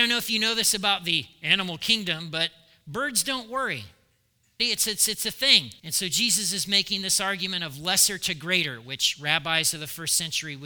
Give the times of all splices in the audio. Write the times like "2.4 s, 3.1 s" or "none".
4.6 s, 5.8 s